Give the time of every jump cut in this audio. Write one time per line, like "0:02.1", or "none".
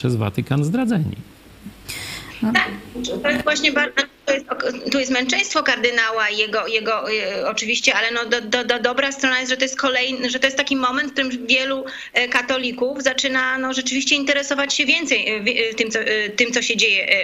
none

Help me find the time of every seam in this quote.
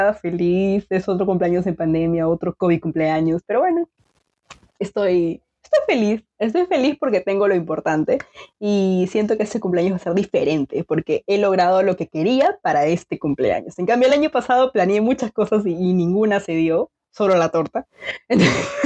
none

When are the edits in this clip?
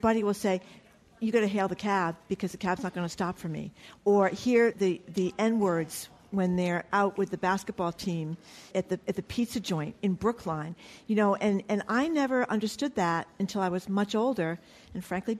0:04.7
0:08.7

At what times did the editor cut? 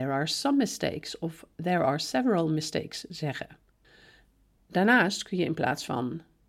none

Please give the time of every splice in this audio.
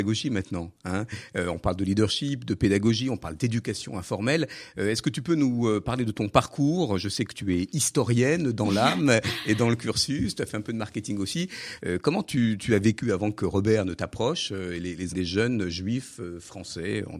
0:11.8
0:15.1

